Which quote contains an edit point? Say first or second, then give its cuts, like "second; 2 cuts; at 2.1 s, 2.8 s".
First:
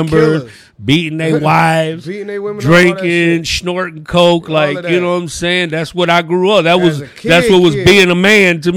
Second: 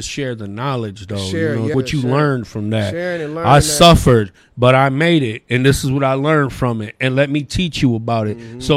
second; 1 cut; at 1.7 s